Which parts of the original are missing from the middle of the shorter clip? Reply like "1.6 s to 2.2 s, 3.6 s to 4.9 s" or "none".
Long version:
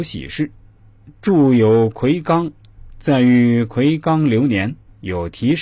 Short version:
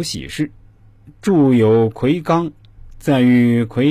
none